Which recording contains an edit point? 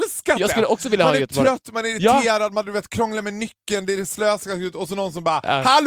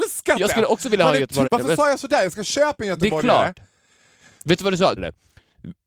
second; 2 cuts; at 1.4 s, 5.0 s

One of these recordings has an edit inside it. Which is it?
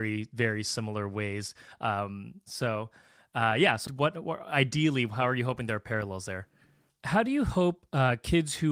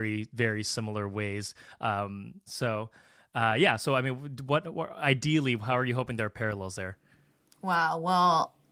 first; 2 cuts; at 3.9 s, 6.9 s

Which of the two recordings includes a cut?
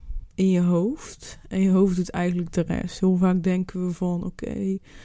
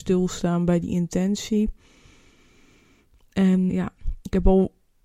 second; 1 cut; at 3.7 s

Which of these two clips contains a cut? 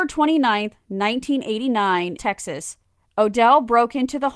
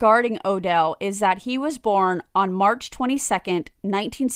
first; 1 cut; at 2.2 s

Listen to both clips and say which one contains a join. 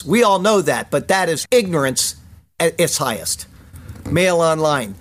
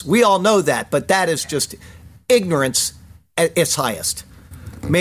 first; 1 cut; at 1.5 s

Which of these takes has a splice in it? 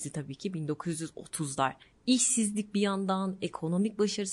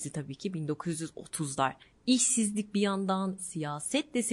second; 1 cut; at 3.4 s

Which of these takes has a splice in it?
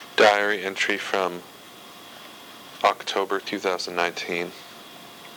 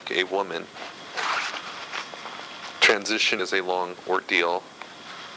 second; 1 cut; at 3.4 s

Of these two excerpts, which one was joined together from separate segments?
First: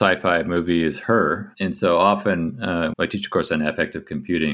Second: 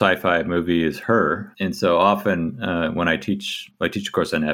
first; 1 cut; at 2.9 s

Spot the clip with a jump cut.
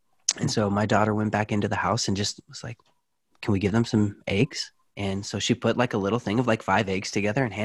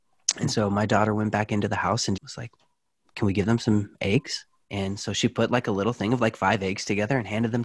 second; 1 cut; at 2.2 s

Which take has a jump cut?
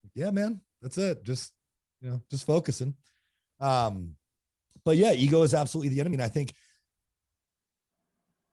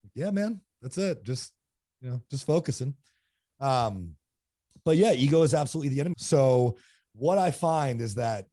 second; 1 cut; at 6.1 s

